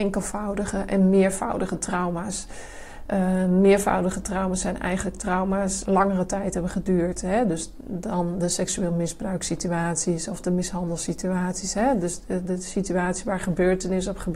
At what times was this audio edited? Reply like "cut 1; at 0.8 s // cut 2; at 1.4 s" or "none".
cut 1; at 5.9 s